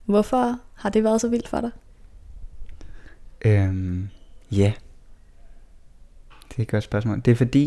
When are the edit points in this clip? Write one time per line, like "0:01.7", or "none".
none